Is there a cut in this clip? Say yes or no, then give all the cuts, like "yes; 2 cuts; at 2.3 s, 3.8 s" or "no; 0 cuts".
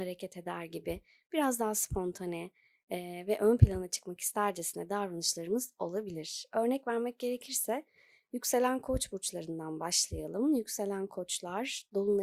no; 0 cuts